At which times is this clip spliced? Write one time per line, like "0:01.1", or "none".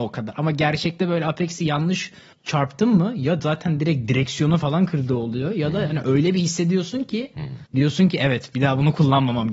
0:07.7

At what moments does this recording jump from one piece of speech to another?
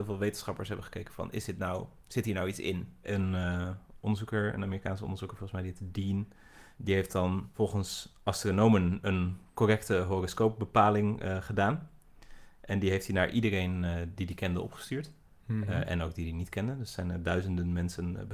none

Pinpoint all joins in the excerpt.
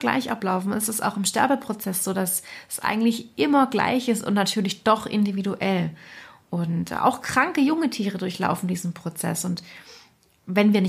none

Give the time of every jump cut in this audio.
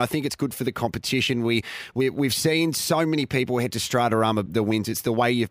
0:04.5

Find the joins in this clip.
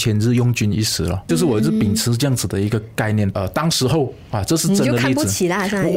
0:01.3
0:03.3

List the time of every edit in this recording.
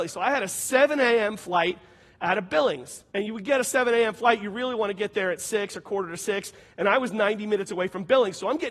0:03.1

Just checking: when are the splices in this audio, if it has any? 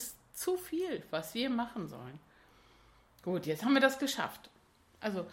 none

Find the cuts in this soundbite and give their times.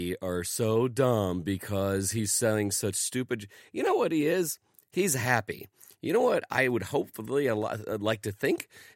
none

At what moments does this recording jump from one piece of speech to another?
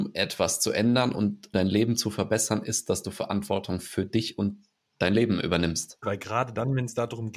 0:01.5
0:06.0

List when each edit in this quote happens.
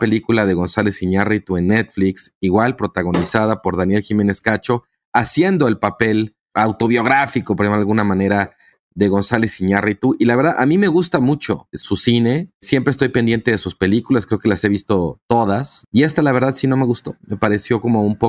none

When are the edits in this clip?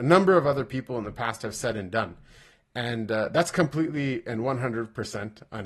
none

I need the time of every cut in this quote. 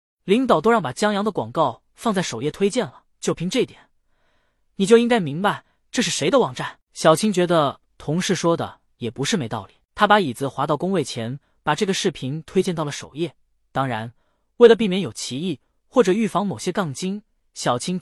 0:03.1

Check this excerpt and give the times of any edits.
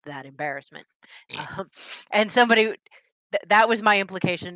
0:01.3

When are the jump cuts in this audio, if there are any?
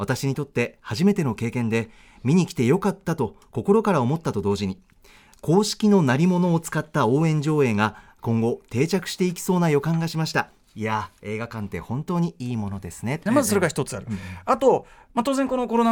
0:13.3

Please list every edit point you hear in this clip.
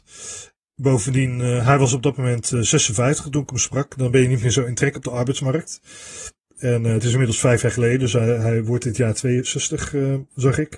none

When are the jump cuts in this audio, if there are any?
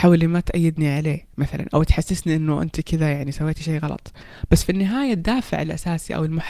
0:01.7

